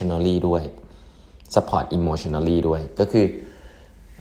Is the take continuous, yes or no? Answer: yes